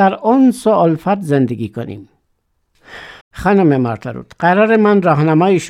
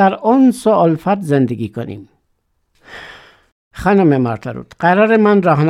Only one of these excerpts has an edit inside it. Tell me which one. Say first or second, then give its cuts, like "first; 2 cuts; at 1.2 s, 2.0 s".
first; 1 cut; at 3.2 s